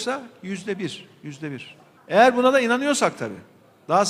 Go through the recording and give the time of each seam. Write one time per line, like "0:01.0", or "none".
0:02.0